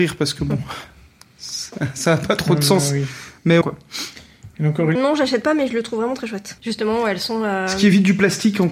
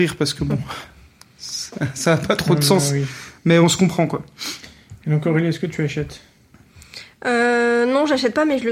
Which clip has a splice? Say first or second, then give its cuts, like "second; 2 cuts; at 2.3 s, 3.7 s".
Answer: first; 3 cuts; at 3.6 s, 5.0 s, 6.6 s